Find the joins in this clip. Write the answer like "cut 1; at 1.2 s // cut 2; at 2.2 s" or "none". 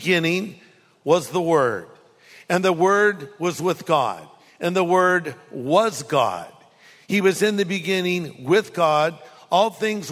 none